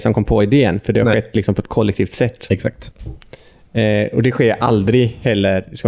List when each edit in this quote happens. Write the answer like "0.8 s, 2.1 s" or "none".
none